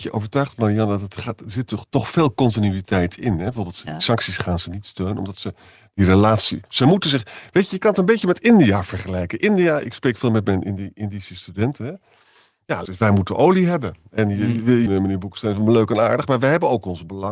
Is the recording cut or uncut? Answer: cut